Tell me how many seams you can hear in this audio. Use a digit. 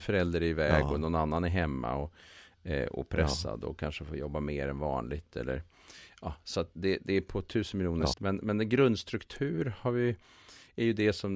1